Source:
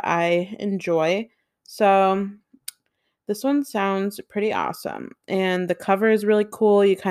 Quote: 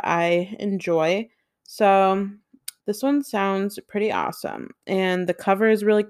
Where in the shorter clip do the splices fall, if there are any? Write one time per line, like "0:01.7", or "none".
0:02.8